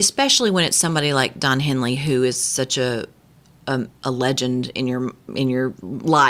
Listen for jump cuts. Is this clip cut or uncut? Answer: uncut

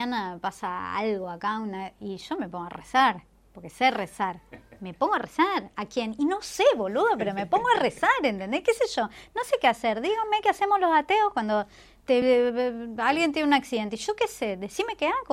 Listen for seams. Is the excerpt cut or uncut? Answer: uncut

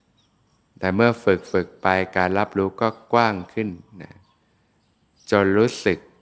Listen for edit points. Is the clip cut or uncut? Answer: uncut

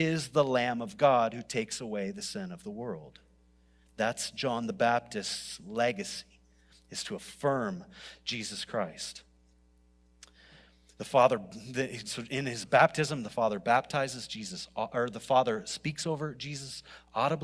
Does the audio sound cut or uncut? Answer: uncut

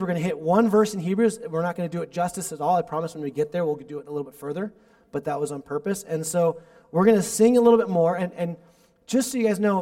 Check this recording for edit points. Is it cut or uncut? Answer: uncut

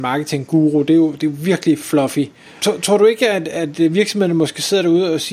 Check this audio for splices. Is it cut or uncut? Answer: cut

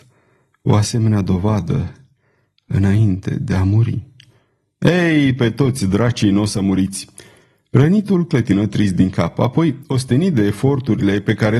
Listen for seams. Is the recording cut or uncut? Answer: uncut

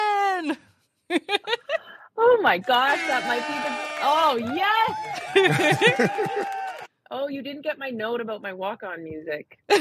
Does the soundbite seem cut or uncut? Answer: uncut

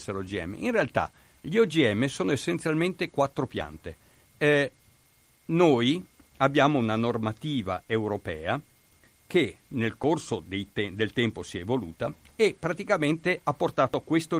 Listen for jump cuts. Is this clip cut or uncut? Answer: cut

